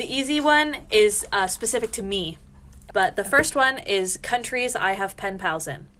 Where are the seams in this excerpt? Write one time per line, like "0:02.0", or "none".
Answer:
0:02.9